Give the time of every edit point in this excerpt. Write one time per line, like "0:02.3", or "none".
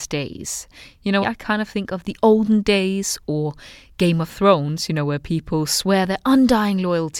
0:01.2